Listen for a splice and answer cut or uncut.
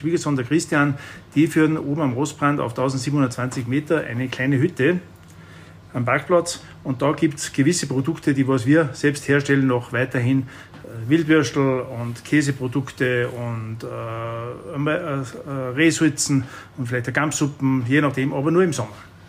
uncut